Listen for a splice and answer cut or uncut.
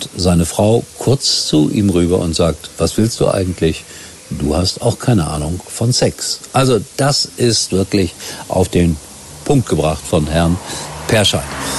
uncut